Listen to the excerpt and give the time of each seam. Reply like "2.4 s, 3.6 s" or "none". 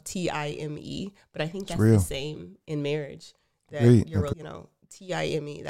2.6 s, 4.3 s